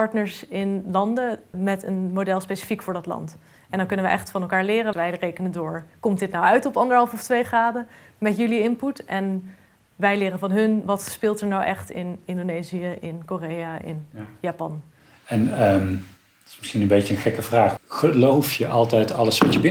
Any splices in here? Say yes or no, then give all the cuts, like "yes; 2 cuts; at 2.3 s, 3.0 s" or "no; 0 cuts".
yes; 3 cuts; at 1.5 s, 4.9 s, 17.8 s